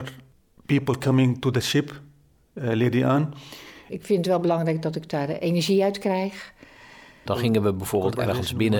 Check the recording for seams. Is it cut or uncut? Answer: cut